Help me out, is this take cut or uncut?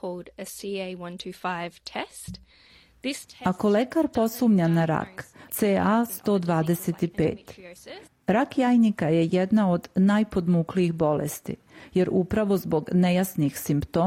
cut